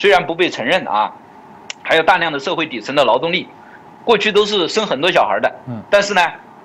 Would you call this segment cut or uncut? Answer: uncut